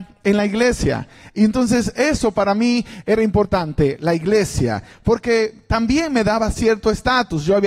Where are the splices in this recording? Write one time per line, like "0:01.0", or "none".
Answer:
none